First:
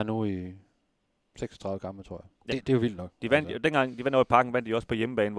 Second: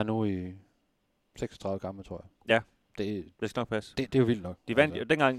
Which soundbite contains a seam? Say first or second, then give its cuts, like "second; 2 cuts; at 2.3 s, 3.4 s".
first; 1 cut; at 2.5 s